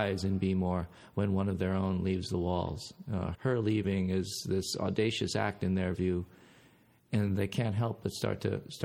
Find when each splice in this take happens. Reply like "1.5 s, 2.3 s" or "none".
3.3 s